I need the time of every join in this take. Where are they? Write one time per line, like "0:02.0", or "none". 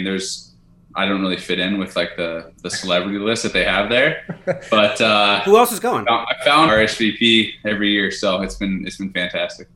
0:06.7